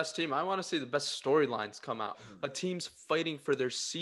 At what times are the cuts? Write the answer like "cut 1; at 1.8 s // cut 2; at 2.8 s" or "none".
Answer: cut 1; at 2.1 s